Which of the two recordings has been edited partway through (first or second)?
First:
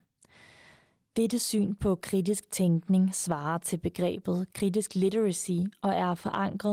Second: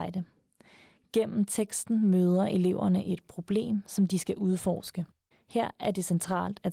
second